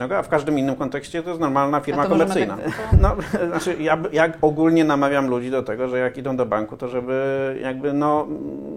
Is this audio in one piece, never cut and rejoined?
no; 1 cut; at 2.6 s

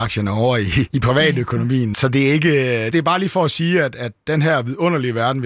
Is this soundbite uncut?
no; 1 cut; at 2.9 s

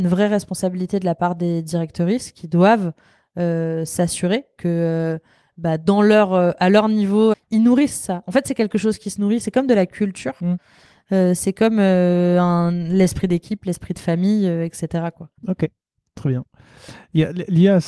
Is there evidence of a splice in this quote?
yes; 2 cuts; at 7.3 s, 15.4 s

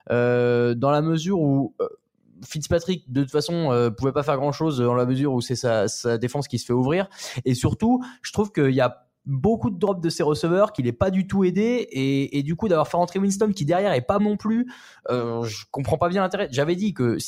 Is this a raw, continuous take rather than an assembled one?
no; 1 cut; at 14.2 s

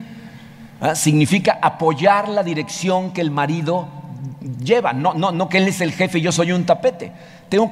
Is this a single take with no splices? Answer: yes; 0 cuts

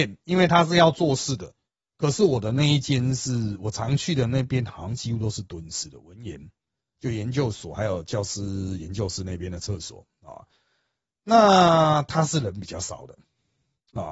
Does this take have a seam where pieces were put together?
no; 0 cuts

